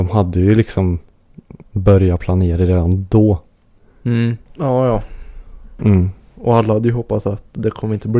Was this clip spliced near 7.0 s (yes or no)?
no